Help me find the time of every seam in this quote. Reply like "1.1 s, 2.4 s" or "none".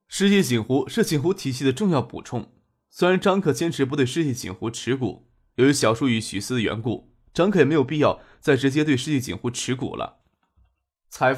none